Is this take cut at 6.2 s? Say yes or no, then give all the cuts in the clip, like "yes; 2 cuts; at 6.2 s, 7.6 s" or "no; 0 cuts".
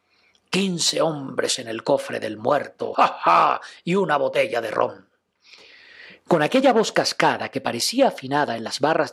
no; 1 cut; at 2.9 s